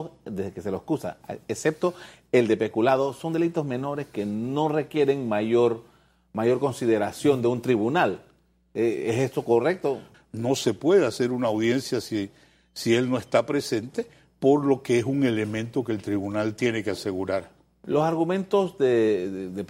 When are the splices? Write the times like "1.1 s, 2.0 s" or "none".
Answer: 10.1 s